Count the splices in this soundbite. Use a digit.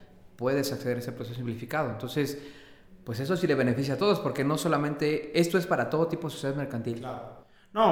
0